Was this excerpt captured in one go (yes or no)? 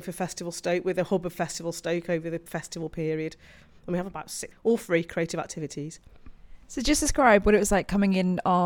no